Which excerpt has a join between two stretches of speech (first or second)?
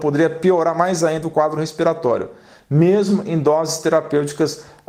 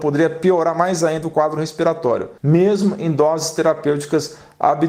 second